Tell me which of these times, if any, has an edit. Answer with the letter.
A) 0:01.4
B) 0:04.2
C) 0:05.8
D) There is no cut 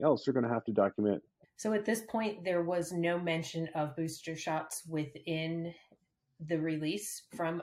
A